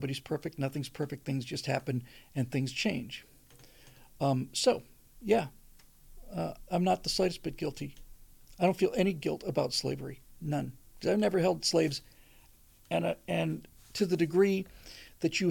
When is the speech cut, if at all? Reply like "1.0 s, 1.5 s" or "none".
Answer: none